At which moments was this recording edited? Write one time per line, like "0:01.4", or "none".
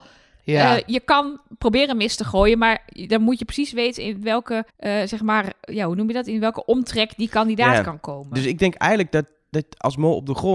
0:04.7